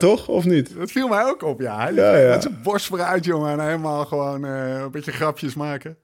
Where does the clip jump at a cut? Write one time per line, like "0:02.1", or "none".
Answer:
none